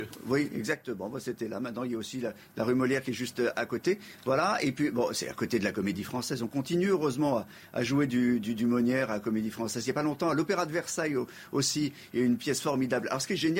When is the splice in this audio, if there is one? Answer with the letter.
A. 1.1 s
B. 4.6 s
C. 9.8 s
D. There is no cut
D